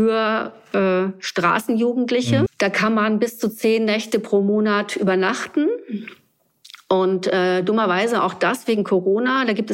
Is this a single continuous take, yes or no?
no